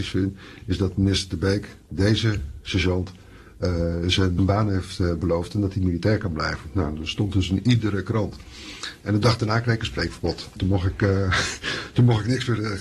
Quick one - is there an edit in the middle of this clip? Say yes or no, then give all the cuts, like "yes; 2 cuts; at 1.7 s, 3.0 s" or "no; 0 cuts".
yes; 1 cut; at 4.4 s